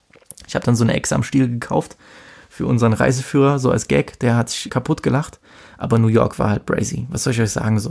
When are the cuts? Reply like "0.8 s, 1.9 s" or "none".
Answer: 4.7 s